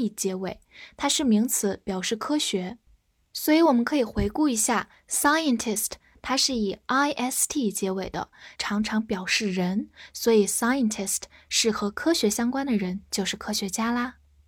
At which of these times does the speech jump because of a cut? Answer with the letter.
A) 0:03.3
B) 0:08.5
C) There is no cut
B